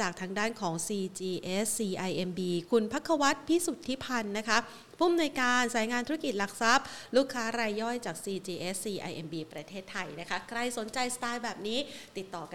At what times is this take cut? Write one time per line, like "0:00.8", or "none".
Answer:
none